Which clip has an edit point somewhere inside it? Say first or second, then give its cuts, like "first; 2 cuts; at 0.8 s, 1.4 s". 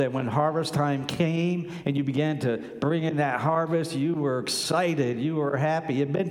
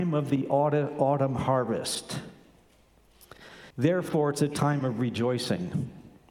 second; 1 cut; at 3.7 s